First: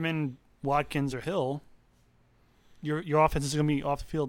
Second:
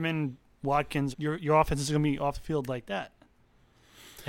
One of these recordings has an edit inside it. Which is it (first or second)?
second